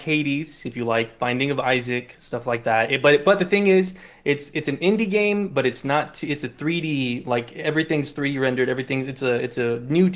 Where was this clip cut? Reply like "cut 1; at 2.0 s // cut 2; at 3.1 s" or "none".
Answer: none

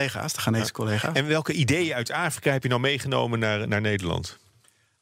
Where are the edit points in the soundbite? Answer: none

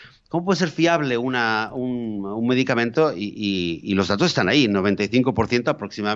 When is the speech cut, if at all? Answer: none

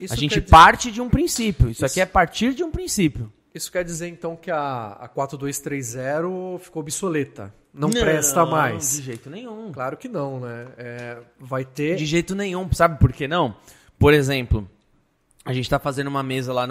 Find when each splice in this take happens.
none

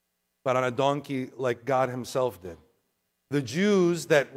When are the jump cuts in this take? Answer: cut 1; at 3.1 s

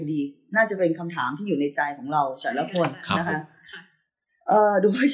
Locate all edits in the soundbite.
none

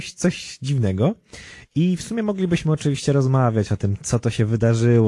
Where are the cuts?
none

